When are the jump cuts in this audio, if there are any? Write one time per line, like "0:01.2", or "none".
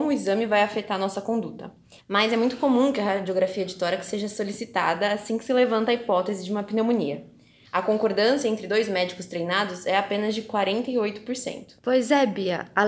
0:02.0
0:07.6
0:11.8